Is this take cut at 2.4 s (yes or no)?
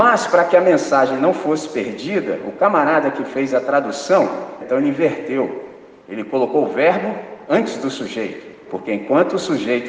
no